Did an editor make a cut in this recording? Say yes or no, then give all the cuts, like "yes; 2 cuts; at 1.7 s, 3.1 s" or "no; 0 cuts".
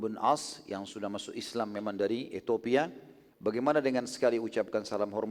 yes; 1 cut; at 3.3 s